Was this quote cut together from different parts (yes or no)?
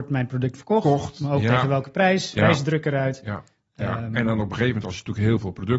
yes